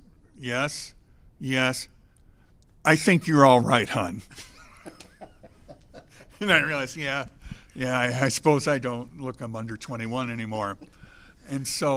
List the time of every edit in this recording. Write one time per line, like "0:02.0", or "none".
0:09.4